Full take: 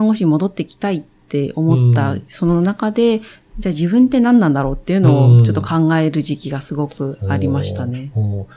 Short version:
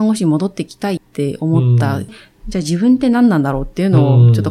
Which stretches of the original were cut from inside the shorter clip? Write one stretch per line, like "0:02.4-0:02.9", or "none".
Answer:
0:01.0-0:01.1
0:02.2-0:03.2